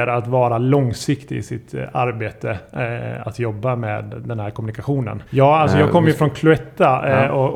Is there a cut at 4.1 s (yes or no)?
yes